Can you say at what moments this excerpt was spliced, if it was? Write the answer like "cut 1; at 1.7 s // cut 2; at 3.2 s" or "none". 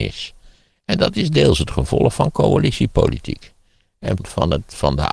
cut 1; at 4.2 s